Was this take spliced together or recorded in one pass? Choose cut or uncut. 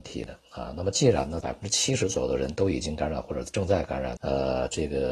cut